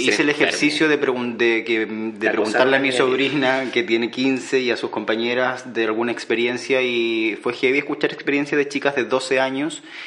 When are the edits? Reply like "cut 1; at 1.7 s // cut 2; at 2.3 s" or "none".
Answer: none